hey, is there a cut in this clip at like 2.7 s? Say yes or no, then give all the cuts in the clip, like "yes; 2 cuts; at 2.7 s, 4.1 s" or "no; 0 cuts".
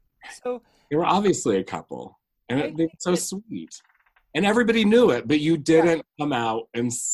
no; 0 cuts